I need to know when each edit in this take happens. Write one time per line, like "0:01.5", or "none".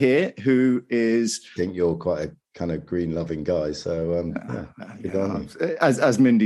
0:01.6